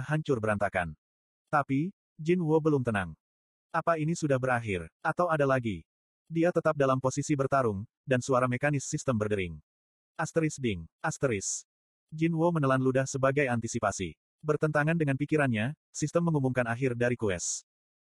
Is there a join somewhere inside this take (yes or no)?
yes